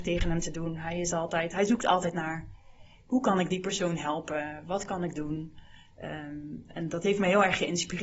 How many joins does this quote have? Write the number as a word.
zero